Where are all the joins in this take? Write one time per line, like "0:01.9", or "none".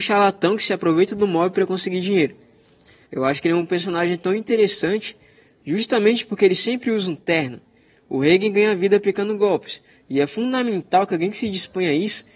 0:03.1